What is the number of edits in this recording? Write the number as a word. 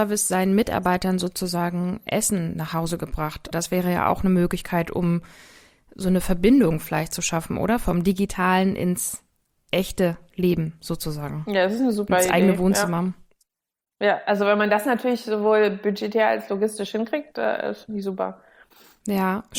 one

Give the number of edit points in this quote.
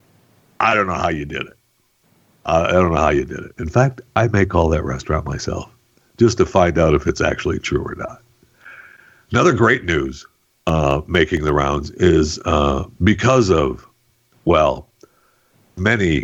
one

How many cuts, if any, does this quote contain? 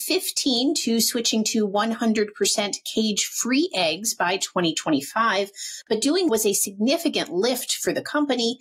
one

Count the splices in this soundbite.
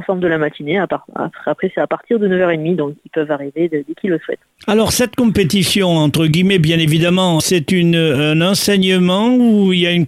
one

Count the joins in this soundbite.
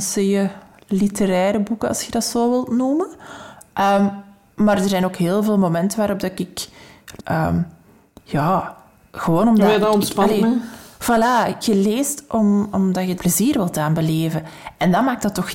three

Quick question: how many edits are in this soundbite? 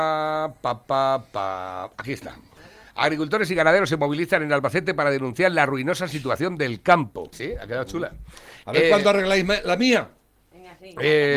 one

